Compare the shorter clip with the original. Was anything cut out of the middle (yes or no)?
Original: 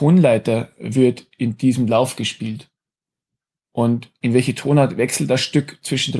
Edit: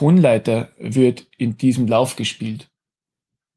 no